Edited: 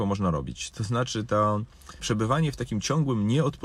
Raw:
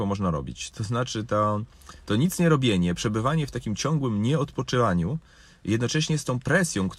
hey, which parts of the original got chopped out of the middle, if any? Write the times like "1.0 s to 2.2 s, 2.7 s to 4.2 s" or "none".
2.0 s to 2.9 s